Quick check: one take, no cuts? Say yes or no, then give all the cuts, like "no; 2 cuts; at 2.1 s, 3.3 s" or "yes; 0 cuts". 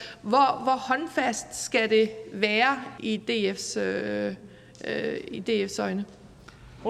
no; 1 cut; at 3.0 s